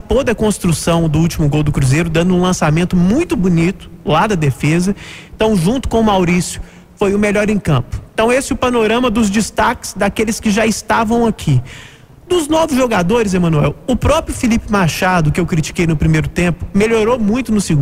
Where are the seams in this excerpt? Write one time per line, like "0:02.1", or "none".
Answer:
none